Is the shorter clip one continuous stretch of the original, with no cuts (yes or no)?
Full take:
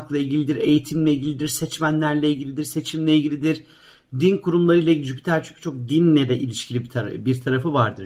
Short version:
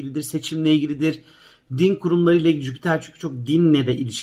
yes